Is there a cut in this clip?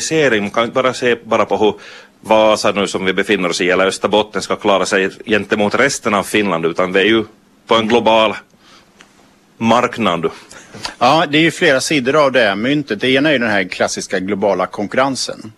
no; 0 cuts

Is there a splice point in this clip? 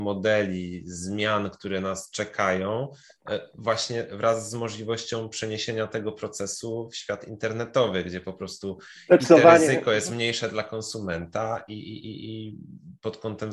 no; 0 cuts

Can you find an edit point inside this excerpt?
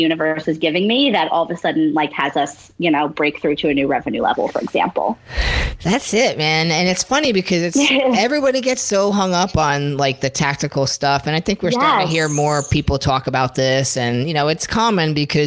no; 0 cuts

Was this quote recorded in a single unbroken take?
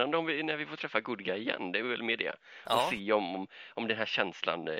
yes; 0 cuts

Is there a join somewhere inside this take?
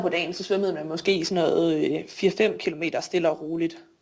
no; 0 cuts

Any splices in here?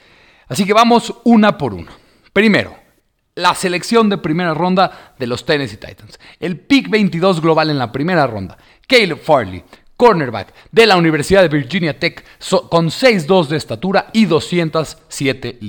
no; 0 cuts

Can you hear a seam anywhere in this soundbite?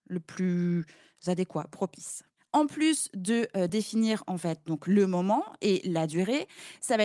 no; 0 cuts

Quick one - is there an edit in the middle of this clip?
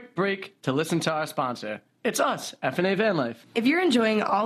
no; 0 cuts

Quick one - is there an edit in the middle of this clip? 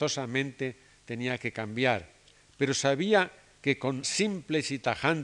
yes; 1 cut; at 4.0 s

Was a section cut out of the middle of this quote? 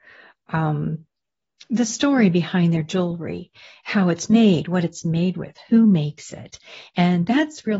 no; 0 cuts

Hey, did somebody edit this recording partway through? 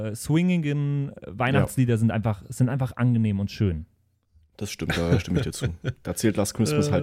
no; 0 cuts

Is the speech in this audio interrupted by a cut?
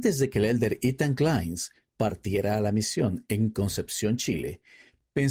no; 0 cuts

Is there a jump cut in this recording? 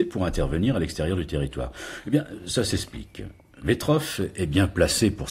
no; 0 cuts

